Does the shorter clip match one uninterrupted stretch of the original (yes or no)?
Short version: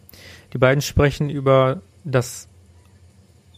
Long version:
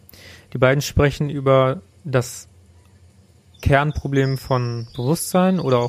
yes